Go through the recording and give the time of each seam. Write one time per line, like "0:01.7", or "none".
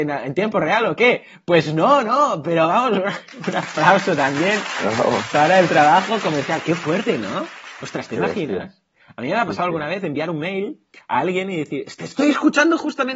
none